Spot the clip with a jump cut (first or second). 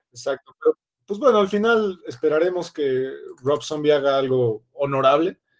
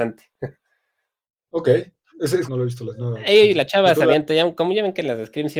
second